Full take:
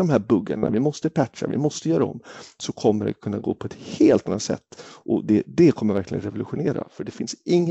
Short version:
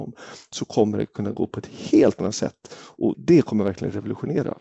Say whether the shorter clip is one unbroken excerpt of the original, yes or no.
no